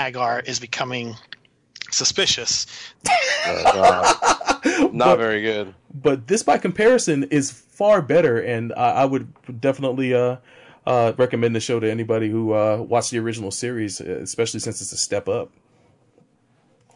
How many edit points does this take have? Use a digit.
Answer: 1